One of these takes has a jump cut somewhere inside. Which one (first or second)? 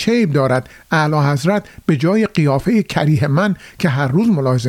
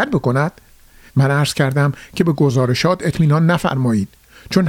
second